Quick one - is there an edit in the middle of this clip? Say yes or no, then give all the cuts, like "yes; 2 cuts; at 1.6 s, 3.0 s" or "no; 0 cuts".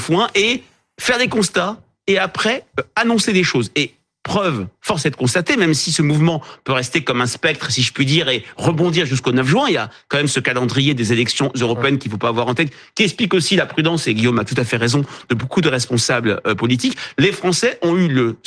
no; 0 cuts